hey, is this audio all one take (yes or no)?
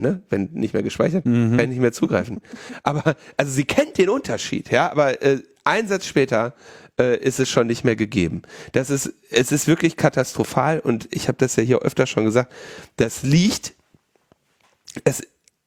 yes